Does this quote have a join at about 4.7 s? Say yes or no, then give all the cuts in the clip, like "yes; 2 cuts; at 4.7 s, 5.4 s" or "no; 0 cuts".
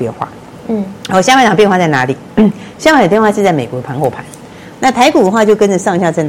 yes; 1 cut; at 4.7 s